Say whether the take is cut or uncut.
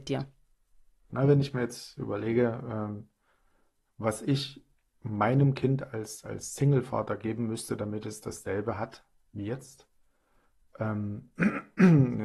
cut